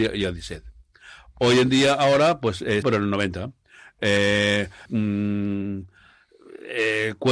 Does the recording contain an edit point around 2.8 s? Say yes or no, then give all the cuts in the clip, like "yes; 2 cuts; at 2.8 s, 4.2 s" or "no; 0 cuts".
yes; 2 cuts; at 2.8 s, 4.9 s